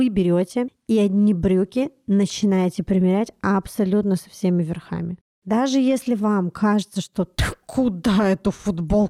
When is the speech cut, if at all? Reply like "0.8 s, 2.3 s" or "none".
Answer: none

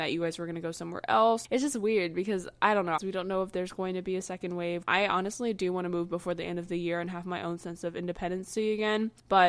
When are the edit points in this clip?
3.0 s, 4.8 s

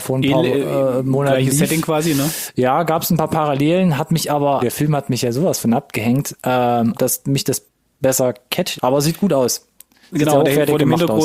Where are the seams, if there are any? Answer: 4.6 s, 6.9 s, 8.8 s

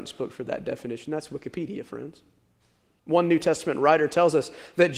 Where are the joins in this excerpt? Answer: 3.0 s

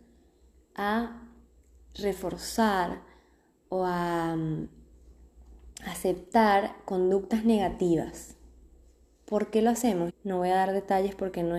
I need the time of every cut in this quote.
10.1 s

